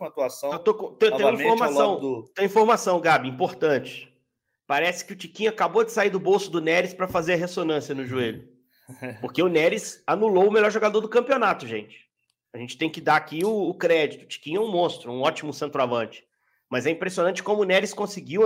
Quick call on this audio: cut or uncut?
uncut